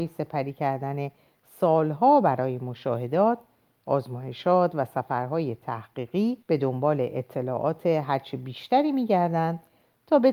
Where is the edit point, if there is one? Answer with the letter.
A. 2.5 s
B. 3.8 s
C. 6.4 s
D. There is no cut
C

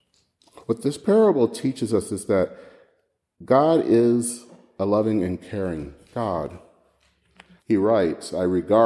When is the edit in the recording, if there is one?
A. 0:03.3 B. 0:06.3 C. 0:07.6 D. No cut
C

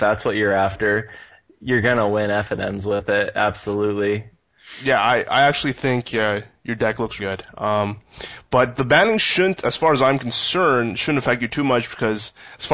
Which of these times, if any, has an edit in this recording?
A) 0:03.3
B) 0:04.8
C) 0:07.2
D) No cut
C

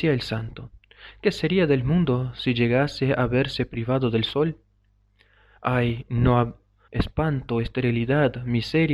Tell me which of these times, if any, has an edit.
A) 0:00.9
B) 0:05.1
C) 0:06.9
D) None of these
C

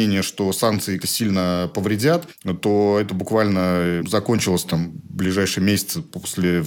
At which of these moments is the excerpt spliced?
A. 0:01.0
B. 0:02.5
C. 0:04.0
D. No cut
A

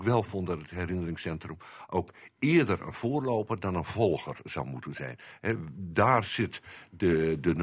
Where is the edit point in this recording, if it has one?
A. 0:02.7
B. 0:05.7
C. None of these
C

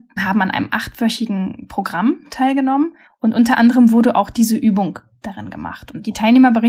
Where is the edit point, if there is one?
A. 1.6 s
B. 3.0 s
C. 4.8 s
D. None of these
B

